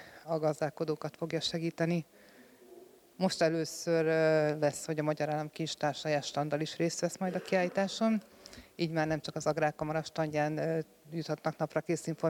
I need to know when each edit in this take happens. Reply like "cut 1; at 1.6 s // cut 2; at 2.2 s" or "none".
none